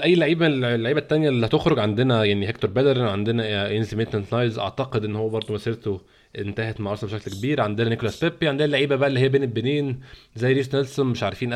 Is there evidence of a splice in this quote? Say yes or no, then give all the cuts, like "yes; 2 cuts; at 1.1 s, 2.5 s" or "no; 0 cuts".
no; 0 cuts